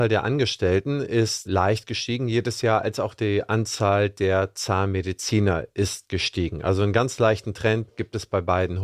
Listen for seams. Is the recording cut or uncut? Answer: uncut